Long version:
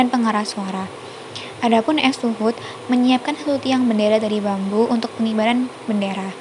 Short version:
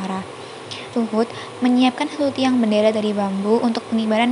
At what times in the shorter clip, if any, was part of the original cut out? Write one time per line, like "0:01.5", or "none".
0:00.9